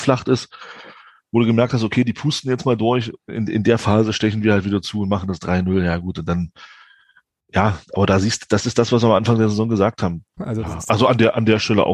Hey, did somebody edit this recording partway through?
yes; 1 cut; at 10.4 s

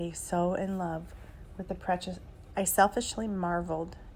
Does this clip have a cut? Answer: yes; 1 cut; at 2.5 s

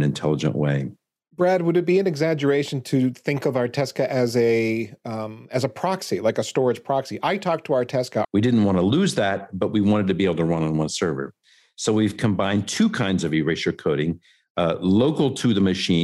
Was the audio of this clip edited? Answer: yes; 1 cut; at 8.2 s

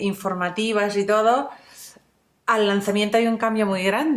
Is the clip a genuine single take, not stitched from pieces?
yes; 0 cuts

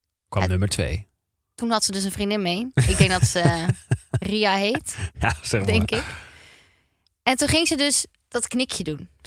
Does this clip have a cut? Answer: no; 0 cuts

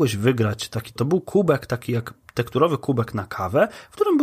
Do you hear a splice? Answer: yes; 1 cut; at 1.0 s

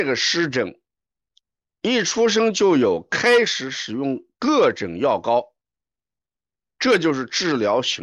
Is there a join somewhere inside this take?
no; 0 cuts

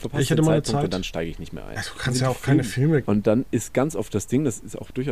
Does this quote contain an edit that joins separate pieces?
yes; 2 cuts; at 1.8 s, 3.0 s

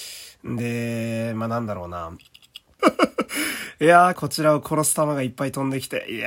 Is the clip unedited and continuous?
no; 2 cuts; at 2.8 s, 4.1 s

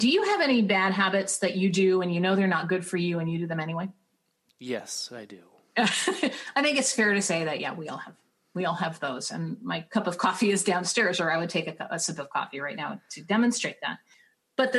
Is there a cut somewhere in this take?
no; 0 cuts

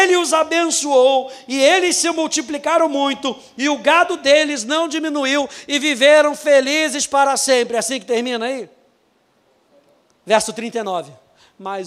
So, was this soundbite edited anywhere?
no; 0 cuts

